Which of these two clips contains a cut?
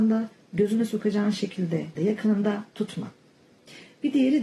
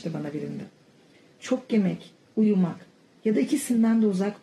first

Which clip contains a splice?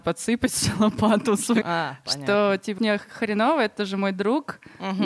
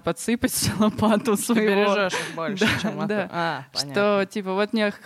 first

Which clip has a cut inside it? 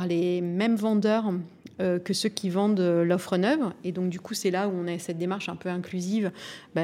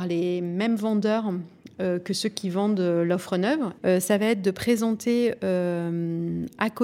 second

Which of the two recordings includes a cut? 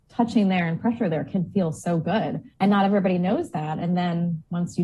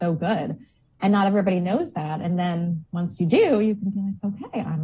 first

